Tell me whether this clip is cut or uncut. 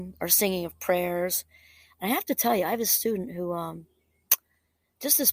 uncut